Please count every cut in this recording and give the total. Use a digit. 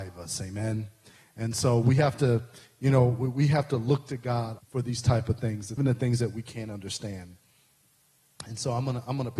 2